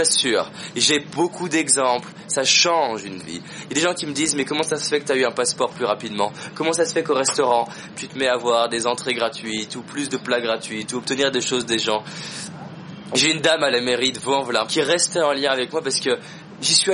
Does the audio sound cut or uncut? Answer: cut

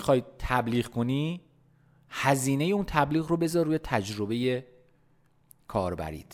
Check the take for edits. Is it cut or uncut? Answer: uncut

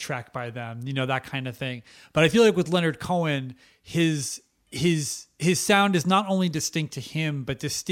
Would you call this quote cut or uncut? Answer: uncut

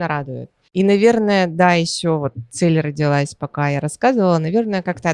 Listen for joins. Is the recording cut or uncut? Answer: uncut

